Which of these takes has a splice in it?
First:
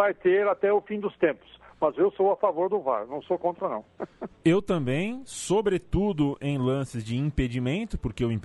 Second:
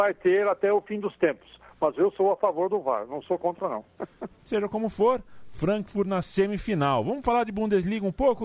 second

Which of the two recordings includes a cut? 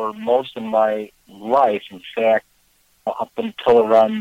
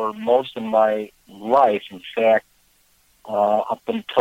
first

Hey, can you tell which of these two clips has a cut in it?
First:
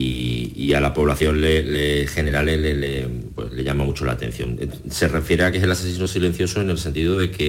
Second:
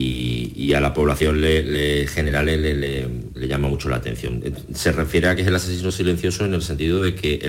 second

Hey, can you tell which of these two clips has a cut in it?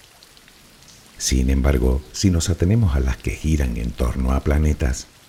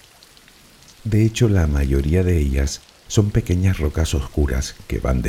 second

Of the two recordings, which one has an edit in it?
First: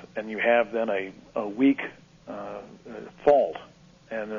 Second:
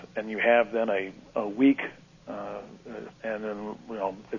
second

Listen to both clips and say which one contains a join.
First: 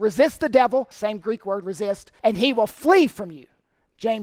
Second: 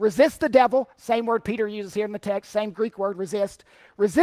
first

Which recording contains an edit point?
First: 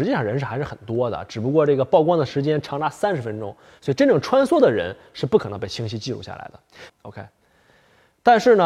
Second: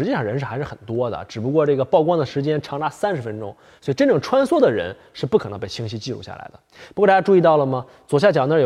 first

